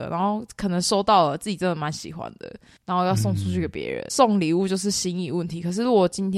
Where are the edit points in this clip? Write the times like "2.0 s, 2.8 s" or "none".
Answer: 4.1 s